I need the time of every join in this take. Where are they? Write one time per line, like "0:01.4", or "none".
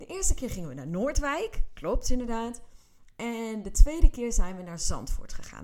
none